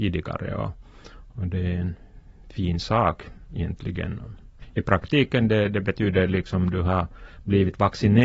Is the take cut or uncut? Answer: uncut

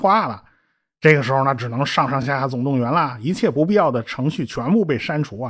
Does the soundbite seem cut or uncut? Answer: uncut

